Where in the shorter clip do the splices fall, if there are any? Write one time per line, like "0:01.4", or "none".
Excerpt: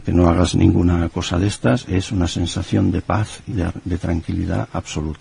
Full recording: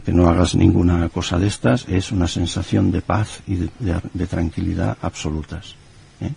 0:03.5